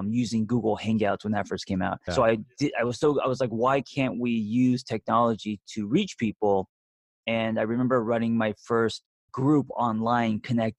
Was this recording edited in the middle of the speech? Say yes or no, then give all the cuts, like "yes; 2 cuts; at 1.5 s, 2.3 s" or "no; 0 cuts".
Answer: yes; 1 cut; at 2.1 s